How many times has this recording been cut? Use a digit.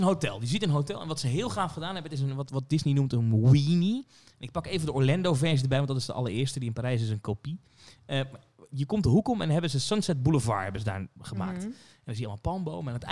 0